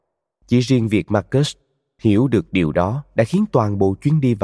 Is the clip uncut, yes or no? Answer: yes